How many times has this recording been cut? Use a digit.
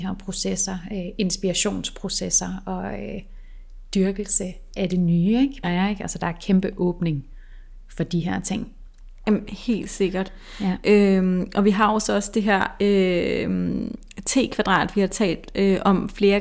1